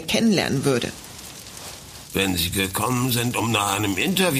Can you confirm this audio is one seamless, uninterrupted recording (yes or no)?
yes